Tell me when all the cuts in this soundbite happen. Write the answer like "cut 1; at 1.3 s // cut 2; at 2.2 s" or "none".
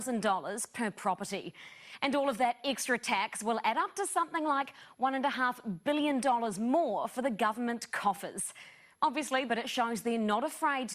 cut 1; at 9.5 s